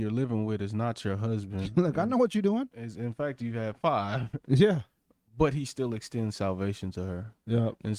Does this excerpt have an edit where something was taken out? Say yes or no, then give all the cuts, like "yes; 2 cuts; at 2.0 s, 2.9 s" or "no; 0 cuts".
no; 0 cuts